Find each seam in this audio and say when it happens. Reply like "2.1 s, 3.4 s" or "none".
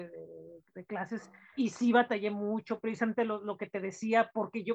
1.6 s